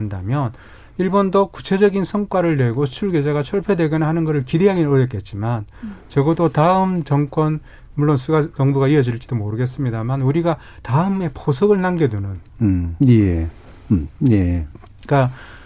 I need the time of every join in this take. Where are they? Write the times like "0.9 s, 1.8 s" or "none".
13.0 s, 14.2 s